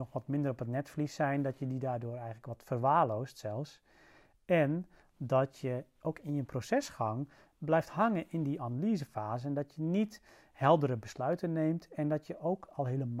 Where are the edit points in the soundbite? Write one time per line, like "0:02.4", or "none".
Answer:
none